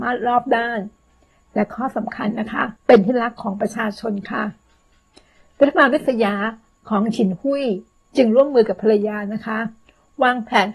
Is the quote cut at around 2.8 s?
yes; 1 cut; at 2.8 s

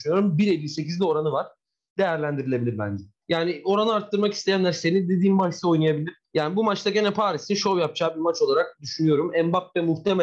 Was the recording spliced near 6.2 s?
yes; 2 cuts; at 3.2 s, 6.2 s

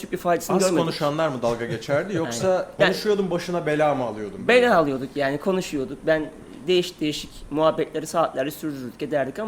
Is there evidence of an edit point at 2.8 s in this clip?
yes; 1 cut; at 2.8 s

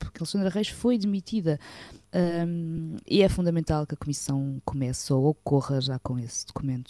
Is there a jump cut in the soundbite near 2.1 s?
yes; 1 cut; at 2.1 s

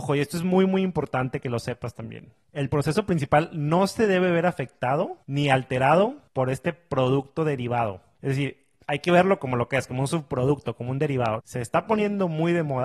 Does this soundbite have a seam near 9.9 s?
no; 1 cut; at 11.4 s

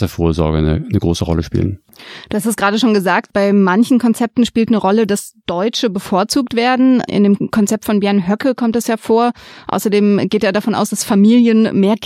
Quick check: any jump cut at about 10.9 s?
no; 0 cuts

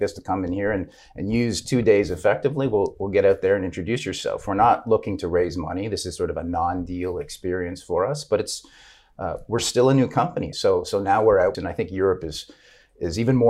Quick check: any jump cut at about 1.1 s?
no; 2 cuts; at 10.5 s, 11.5 s

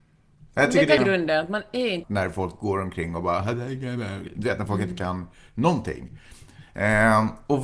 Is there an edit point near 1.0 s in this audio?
yes; 2 cuts; at 1.0 s, 2.0 s

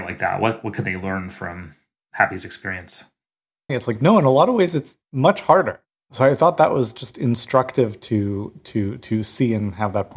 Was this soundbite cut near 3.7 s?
yes; 1 cut; at 3.7 s

